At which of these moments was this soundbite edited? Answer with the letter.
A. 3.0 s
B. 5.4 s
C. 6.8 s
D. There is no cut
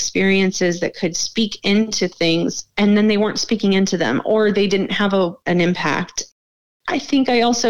B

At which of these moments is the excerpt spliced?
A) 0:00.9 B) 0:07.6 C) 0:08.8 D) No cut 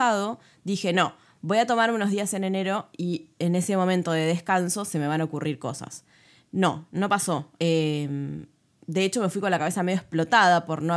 B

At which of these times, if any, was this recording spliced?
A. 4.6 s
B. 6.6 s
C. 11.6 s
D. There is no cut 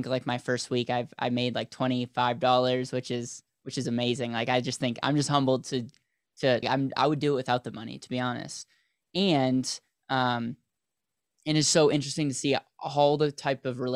B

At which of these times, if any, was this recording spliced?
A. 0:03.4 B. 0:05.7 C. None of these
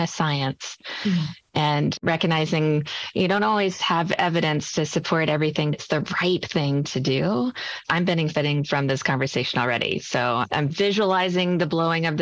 B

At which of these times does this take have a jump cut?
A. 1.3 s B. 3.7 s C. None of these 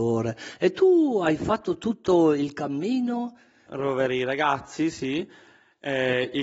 B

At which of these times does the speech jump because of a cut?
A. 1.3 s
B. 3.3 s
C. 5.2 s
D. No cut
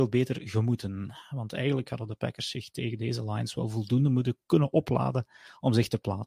D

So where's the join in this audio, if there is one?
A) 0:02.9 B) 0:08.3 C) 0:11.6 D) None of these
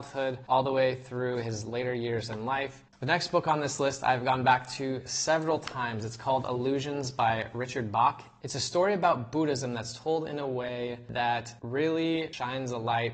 A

